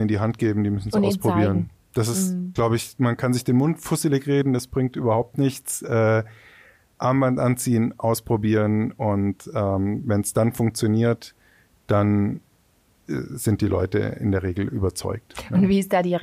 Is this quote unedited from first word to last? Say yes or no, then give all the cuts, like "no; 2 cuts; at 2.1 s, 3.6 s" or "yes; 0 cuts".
yes; 0 cuts